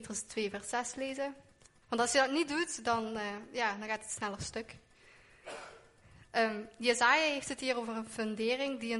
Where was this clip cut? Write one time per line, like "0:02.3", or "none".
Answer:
0:01.8